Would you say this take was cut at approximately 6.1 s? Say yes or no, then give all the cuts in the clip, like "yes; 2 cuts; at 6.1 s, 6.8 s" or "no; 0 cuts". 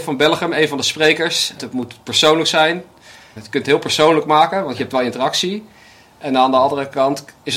no; 2 cuts; at 1.6 s, 3.4 s